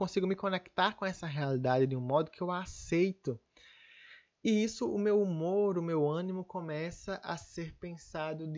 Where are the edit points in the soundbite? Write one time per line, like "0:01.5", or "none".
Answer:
none